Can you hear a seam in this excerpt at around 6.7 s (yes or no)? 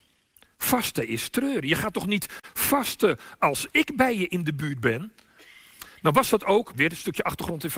yes